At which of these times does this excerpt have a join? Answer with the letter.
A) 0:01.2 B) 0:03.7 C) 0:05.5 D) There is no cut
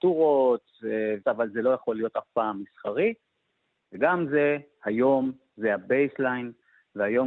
A